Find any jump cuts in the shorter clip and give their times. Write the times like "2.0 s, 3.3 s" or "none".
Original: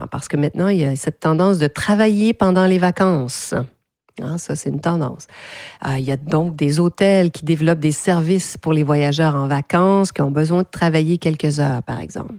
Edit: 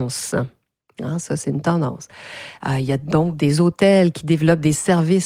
none